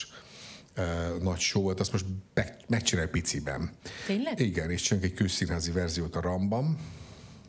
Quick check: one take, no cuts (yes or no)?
yes